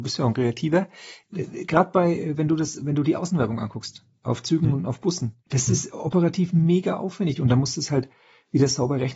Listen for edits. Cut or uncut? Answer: cut